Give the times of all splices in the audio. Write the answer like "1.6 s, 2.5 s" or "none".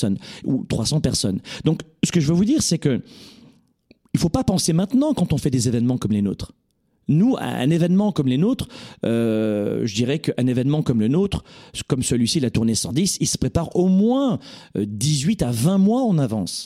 none